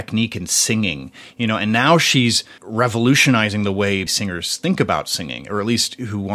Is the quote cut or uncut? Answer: cut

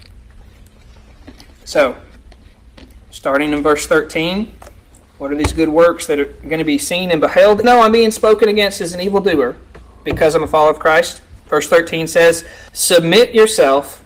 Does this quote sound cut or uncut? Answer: cut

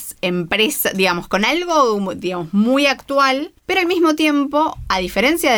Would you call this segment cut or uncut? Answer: cut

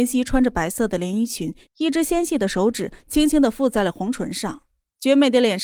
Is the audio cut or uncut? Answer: cut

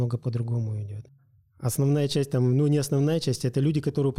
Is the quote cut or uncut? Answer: uncut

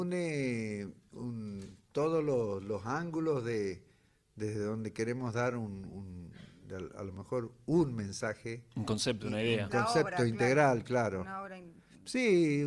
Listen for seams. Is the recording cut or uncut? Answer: uncut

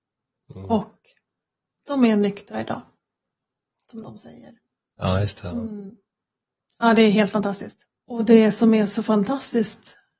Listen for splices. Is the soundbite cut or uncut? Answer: cut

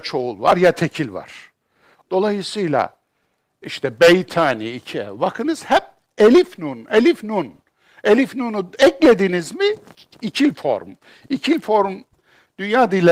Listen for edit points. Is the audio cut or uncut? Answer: cut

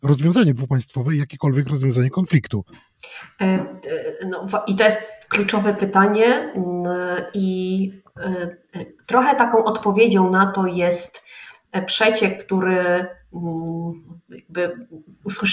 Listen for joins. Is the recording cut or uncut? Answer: uncut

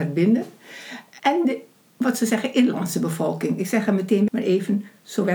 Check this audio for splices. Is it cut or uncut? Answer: cut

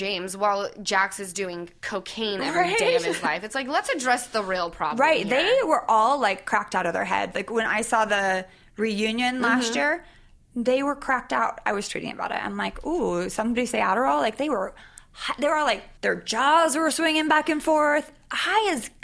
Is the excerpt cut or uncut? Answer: cut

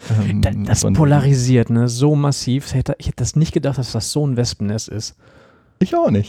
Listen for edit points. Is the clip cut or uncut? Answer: uncut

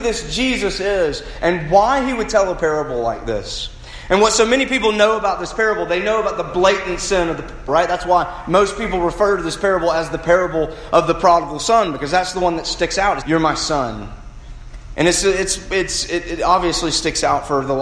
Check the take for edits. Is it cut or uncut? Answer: cut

